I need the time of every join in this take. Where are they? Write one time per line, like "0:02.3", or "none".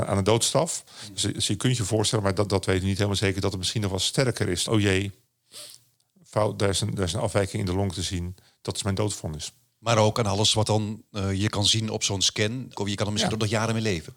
0:04.7
0:12.8